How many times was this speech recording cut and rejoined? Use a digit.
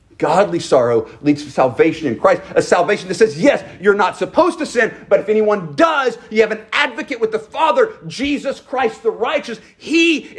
0